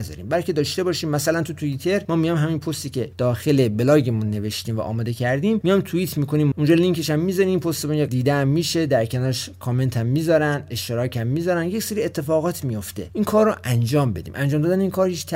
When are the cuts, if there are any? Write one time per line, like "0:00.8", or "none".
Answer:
0:06.5